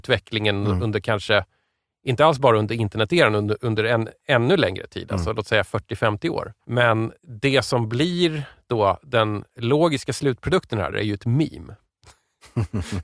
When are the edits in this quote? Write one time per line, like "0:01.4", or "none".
0:07.2
0:10.9